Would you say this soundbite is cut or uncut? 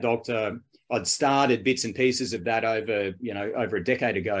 uncut